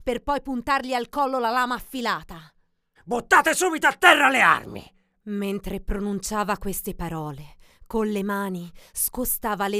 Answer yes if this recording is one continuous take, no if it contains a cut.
no